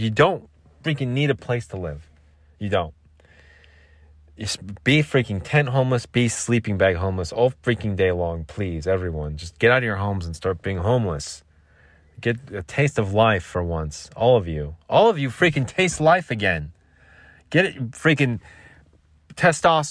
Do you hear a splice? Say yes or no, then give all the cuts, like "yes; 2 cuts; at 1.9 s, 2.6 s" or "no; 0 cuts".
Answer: no; 0 cuts